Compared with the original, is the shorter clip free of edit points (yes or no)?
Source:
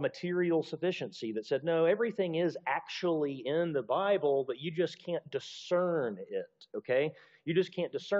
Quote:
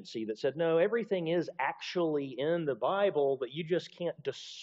yes